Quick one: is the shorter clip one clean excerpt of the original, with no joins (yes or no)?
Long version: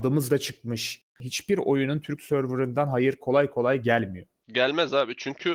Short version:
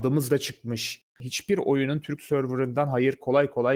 yes